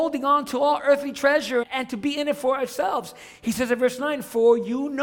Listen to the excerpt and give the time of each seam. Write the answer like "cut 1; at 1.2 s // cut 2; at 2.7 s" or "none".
cut 1; at 1.6 s